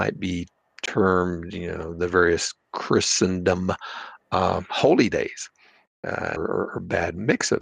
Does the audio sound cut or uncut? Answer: cut